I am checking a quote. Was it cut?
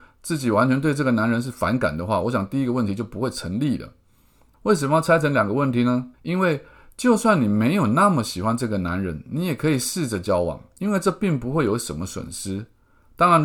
yes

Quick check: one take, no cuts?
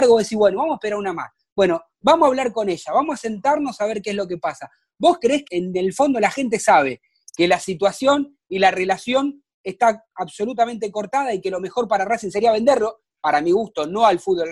no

